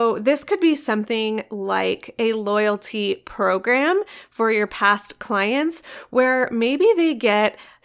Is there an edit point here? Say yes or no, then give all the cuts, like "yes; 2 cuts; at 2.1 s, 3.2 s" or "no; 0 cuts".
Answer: no; 0 cuts